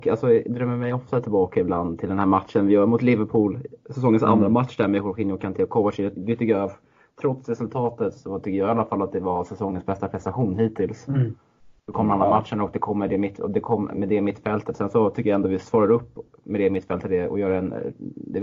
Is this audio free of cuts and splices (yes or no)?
yes